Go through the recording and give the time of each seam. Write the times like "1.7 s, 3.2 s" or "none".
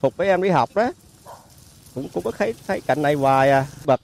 none